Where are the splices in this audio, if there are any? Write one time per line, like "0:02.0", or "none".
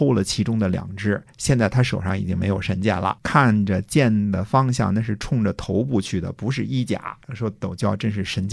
0:03.2
0:07.2